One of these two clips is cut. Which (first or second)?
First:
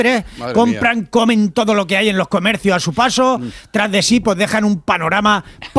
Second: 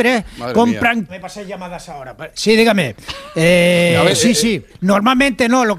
second